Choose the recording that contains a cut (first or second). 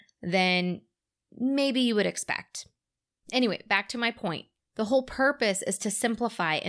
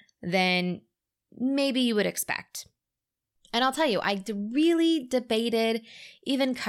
first